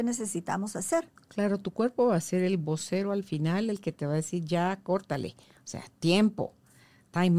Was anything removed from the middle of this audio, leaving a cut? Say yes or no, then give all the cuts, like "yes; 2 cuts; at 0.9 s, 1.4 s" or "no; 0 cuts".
no; 0 cuts